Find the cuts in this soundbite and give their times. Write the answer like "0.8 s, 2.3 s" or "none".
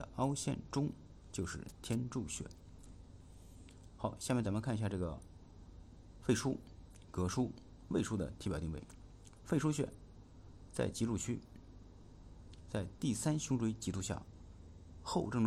none

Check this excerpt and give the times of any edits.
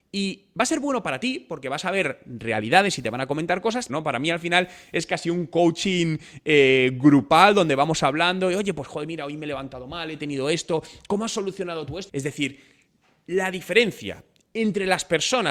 3.9 s, 12.1 s

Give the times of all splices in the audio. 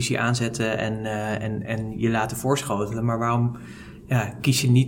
none

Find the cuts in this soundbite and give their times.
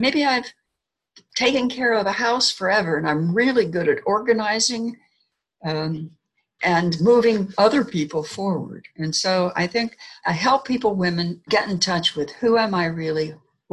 6.6 s, 10.2 s, 11.5 s

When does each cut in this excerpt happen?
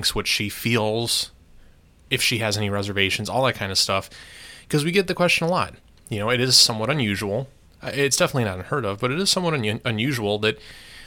none

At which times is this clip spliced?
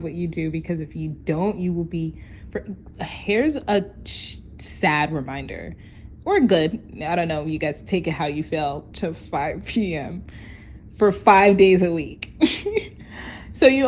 8.9 s

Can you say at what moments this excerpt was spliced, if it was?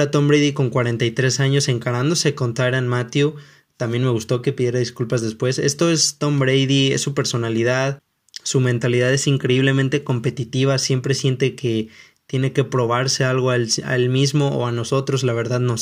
none

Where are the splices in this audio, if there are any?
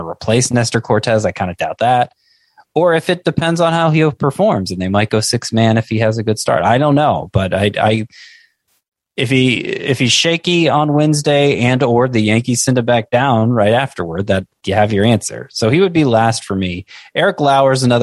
none

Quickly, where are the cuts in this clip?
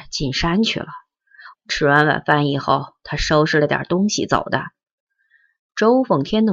1.5 s

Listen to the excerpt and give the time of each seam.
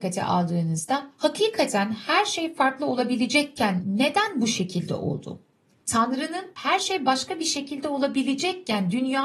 5.8 s

